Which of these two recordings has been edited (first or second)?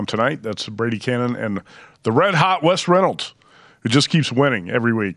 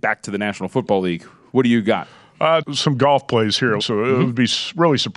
second